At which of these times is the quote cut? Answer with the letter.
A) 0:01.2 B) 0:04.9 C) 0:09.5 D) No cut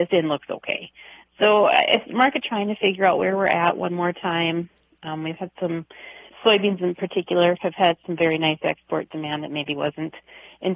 D